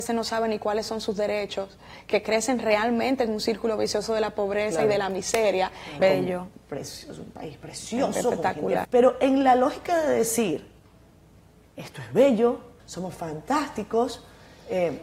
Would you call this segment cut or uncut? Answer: cut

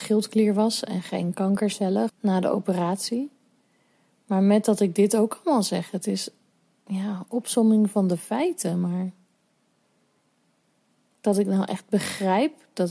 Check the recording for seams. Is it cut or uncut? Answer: cut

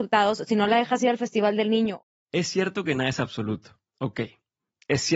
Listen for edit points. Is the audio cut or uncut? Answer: uncut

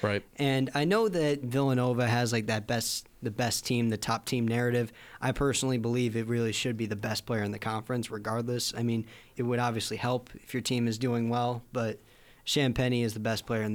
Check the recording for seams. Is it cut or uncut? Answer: cut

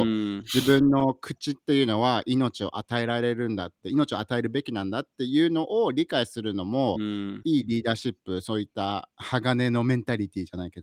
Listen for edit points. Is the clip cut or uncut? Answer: uncut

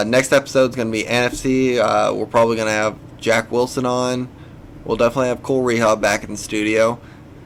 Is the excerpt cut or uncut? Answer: uncut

